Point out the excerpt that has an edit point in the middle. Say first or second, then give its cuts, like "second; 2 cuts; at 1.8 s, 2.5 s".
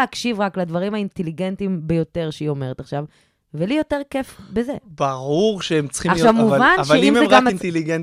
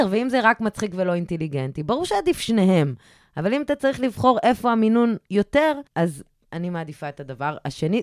second; 1 cut; at 5.9 s